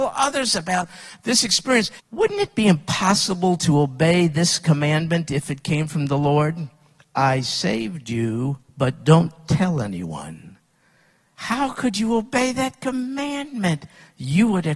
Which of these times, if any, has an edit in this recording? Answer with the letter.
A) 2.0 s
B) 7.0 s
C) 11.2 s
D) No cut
A